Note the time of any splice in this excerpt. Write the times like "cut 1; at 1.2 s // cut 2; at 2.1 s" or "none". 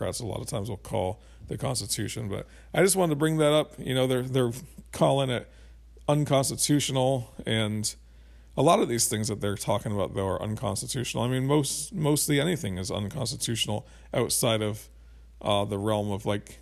none